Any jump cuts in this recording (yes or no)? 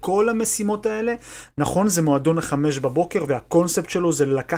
no